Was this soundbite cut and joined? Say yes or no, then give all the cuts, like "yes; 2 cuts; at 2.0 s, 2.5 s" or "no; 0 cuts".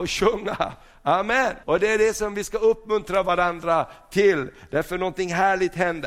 yes; 1 cut; at 1.6 s